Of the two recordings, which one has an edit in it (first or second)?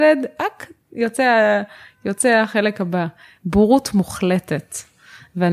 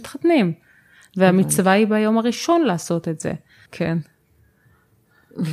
second